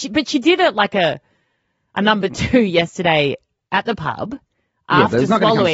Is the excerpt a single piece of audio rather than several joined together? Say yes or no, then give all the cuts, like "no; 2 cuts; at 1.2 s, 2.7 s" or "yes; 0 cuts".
yes; 0 cuts